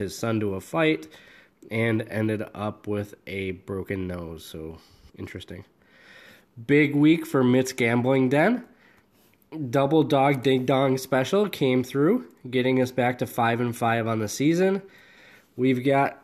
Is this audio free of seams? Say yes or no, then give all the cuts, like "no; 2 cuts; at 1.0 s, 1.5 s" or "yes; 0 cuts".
no; 1 cut; at 5.1 s